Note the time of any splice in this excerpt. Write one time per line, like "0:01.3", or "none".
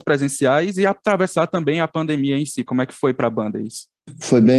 0:02.7